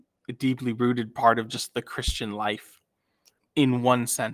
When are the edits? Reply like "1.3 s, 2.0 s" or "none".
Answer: 3.4 s